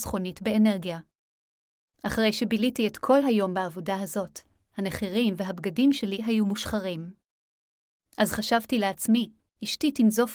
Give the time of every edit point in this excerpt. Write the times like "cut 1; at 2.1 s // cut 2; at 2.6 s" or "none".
none